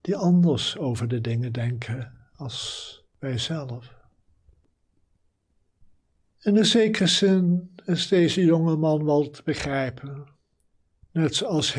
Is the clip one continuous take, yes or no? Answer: yes